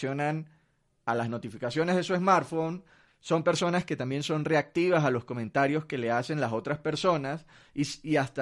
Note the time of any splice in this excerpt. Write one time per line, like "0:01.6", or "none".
0:03.1